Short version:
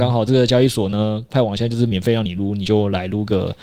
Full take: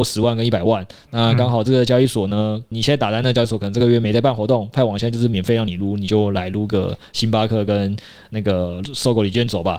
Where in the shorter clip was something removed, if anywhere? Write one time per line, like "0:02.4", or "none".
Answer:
0:01.3

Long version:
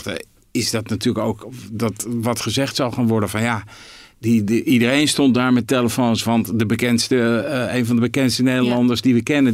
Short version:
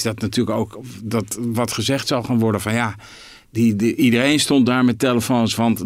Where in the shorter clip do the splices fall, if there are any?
none

